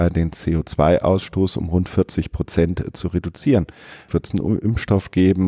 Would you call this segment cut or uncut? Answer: cut